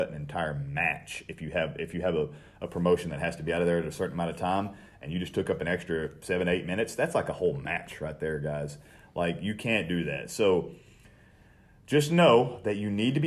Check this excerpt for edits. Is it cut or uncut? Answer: uncut